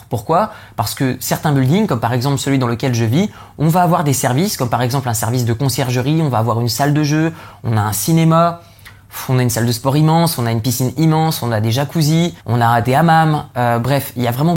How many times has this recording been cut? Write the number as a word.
one